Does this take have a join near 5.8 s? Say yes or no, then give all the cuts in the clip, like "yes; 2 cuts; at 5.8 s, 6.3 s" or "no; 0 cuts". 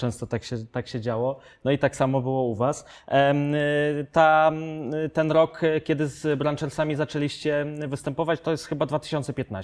no; 0 cuts